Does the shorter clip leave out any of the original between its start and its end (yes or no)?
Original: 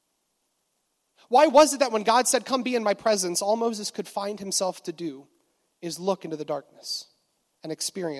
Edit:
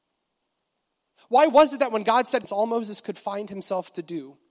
yes